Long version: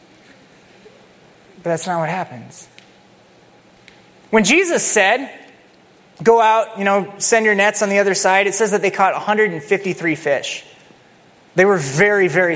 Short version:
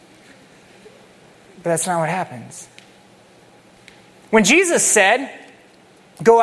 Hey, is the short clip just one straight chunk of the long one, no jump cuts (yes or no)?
yes